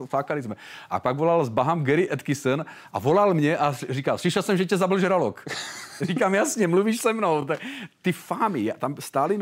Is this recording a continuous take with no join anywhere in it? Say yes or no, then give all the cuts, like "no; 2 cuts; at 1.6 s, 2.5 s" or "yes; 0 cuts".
yes; 0 cuts